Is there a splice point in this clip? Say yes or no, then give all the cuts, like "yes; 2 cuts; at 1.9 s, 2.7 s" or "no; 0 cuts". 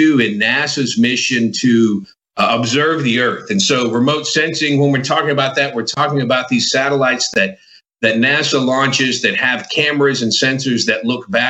no; 0 cuts